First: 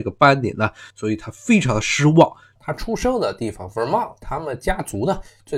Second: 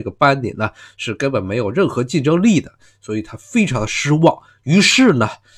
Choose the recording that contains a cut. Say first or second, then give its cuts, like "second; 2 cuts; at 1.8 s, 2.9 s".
first; 2 cuts; at 0.9 s, 2.6 s